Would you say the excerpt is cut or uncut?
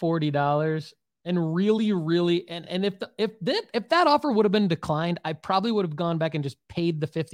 uncut